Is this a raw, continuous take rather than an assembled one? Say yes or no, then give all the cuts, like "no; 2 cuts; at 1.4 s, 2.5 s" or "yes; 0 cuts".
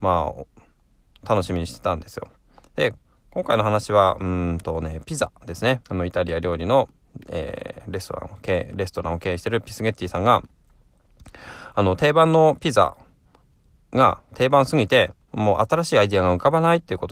no; 1 cut; at 5.8 s